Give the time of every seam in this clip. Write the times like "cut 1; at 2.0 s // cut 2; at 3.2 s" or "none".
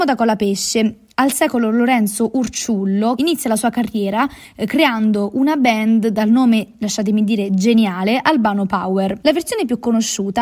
cut 1; at 3.2 s // cut 2; at 9.2 s